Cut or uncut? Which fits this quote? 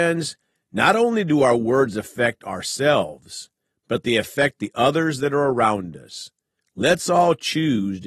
uncut